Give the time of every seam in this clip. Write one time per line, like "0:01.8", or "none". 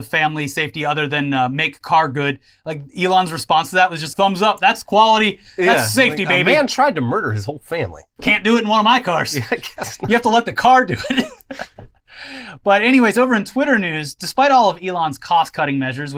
0:04.1